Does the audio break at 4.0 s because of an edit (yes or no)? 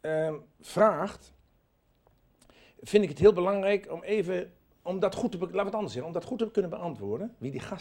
no